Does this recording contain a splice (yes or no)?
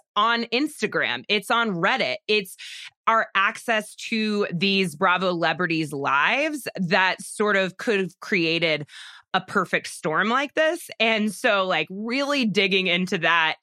no